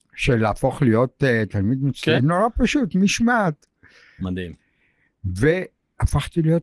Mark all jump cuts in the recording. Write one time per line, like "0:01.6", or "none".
0:02.2
0:04.2